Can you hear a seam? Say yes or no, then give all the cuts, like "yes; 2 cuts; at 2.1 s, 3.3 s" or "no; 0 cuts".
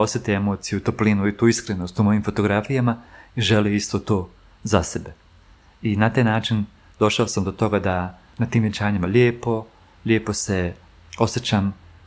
no; 0 cuts